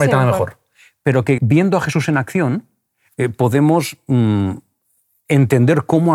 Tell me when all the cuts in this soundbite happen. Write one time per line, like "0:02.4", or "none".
0:01.4